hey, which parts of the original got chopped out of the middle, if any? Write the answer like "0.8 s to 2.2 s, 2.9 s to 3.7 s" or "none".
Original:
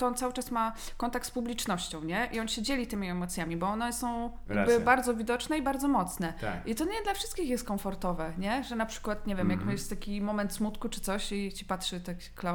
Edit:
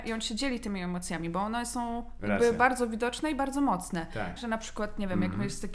6.6 s to 8.6 s